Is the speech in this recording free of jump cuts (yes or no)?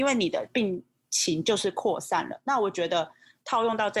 yes